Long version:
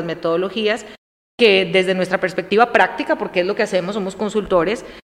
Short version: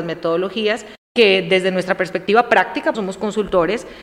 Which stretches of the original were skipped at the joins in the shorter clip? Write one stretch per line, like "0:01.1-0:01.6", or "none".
0:01.0-0:01.3
0:03.2-0:03.9